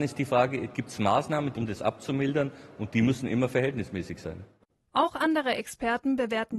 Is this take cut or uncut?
cut